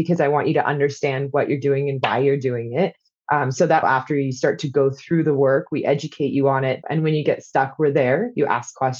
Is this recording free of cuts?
no; 2 cuts; at 3.8 s, 6.8 s

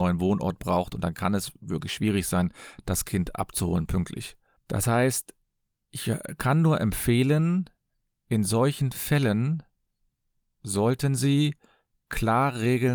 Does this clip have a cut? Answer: no; 0 cuts

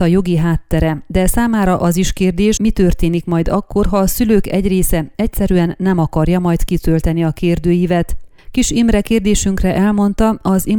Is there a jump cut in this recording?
yes; 1 cut; at 2.6 s

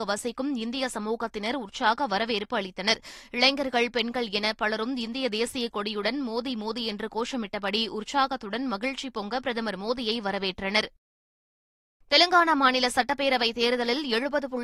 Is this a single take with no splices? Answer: yes; 0 cuts

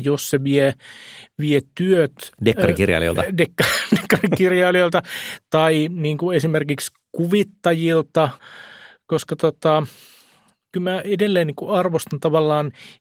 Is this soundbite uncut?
yes; 0 cuts

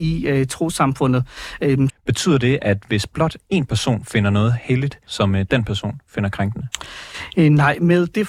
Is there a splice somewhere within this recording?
yes; 2 cuts; at 1.9 s, 5.1 s

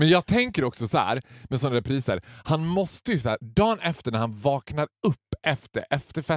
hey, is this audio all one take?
yes; 0 cuts

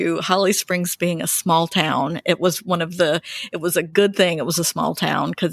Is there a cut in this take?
no; 0 cuts

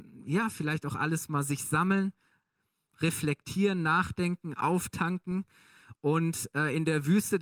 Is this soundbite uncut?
yes; 0 cuts

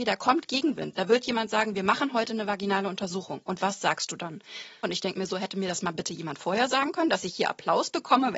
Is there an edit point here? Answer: yes; 1 cut; at 4.8 s

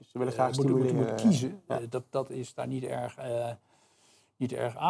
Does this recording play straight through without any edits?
yes; 0 cuts

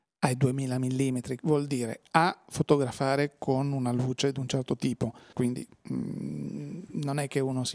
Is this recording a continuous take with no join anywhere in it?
no; 2 cuts; at 1.4 s, 5.3 s

